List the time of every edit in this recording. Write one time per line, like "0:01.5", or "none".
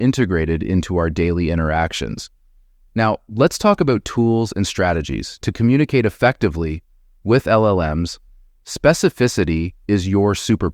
none